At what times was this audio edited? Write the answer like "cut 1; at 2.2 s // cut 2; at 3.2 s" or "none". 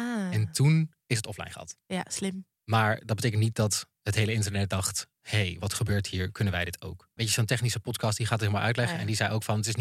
cut 1; at 5.1 s // cut 2; at 7.2 s

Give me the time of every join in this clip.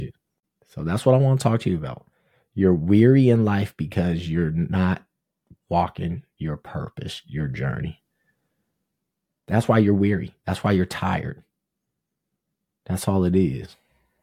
none

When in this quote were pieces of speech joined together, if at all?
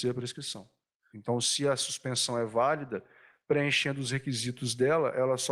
cut 1; at 1.1 s

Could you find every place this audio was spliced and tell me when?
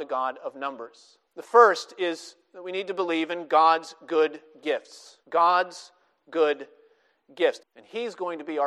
cut 1; at 1.3 s // cut 2; at 5.2 s // cut 3; at 7.6 s

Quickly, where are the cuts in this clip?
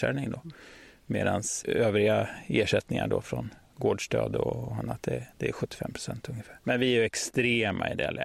none

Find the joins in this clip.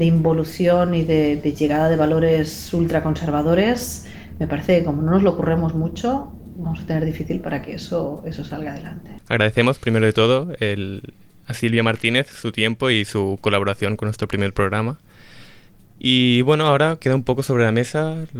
none

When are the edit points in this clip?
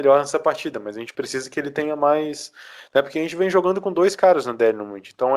none

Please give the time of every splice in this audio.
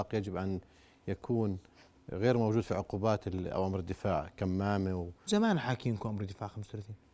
cut 1; at 5.3 s

